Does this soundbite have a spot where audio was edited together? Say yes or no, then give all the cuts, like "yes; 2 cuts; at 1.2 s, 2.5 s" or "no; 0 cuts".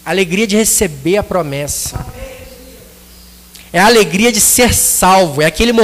no; 0 cuts